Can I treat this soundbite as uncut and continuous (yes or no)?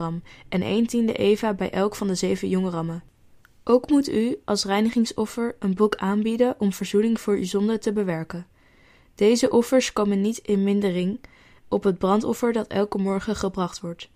yes